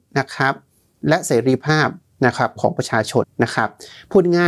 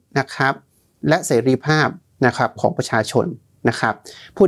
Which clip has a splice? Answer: first; 1 cut; at 3.2 s

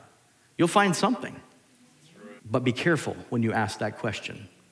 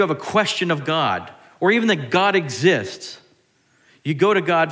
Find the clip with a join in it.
first; 1 cut; at 2.4 s

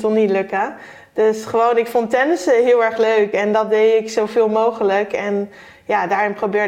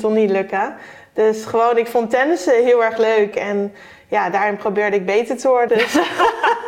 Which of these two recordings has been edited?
second; 2 cuts; at 3.3 s, 5.7 s

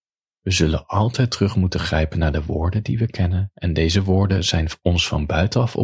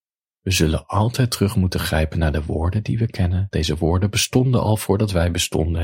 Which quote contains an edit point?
second; 1 cut; at 3.5 s

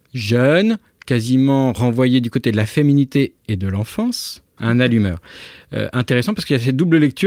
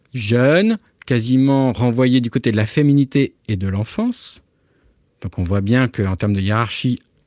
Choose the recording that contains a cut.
first; 1 cut; at 4.6 s

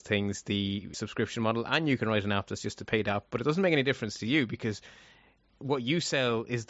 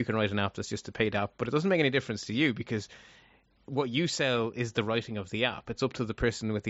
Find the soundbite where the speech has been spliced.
first; 1 cut; at 0.9 s

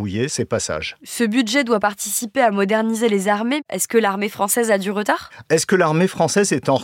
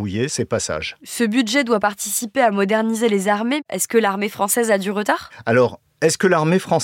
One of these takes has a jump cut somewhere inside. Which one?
first; 1 cut; at 5.4 s

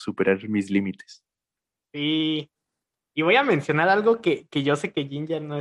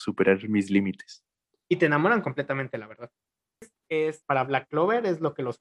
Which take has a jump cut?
second; 2 cuts; at 1.5 s, 4.2 s

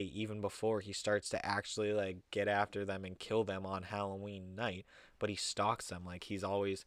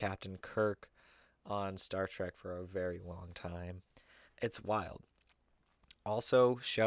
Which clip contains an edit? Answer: second; 1 cut; at 4.3 s

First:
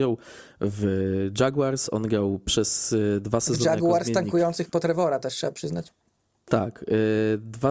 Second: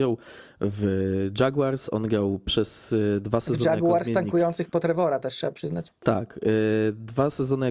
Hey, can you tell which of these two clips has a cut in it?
second; 1 cut; at 6.0 s

